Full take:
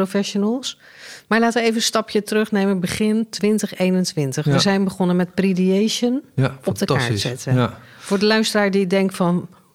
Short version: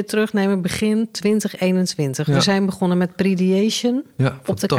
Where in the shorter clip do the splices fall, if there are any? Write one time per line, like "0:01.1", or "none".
none